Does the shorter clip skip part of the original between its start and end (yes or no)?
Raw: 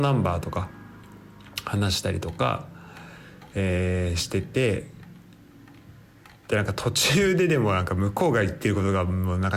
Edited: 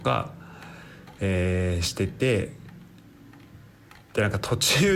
no